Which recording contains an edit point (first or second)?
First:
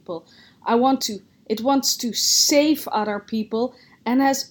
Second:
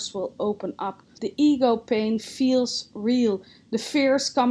second